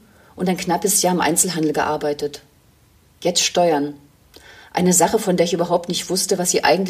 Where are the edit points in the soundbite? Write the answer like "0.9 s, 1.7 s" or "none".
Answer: none